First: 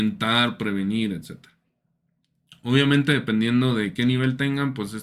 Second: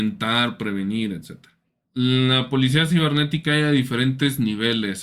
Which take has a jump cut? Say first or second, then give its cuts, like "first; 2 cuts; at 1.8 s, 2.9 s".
second; 1 cut; at 1.8 s